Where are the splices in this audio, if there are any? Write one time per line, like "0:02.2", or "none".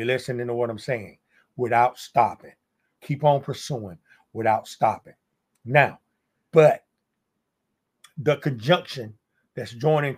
0:03.0
0:06.5